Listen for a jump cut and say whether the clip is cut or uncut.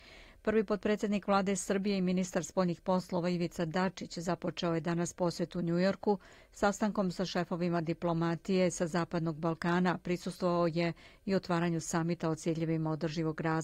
uncut